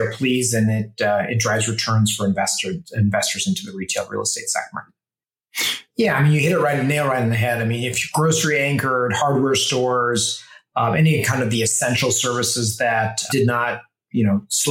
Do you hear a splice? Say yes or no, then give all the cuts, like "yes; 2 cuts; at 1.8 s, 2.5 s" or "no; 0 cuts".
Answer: yes; 2 cuts; at 5.9 s, 13.3 s